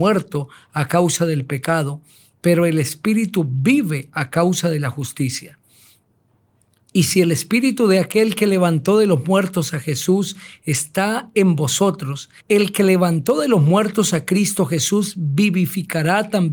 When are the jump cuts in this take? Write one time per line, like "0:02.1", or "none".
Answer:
0:12.4